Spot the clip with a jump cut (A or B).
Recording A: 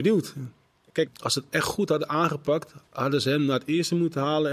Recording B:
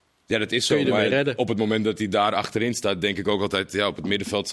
A